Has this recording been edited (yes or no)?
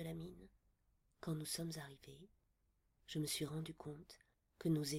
yes